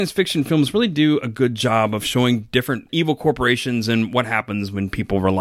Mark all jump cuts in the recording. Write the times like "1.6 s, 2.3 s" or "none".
none